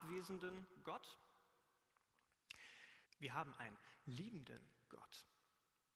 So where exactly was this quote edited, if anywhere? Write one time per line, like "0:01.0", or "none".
0:03.0